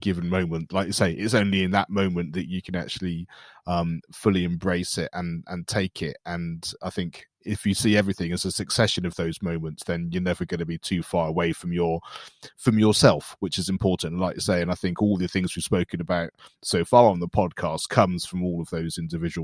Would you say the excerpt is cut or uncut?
uncut